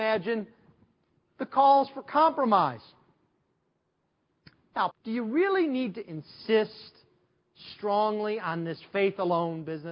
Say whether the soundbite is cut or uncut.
cut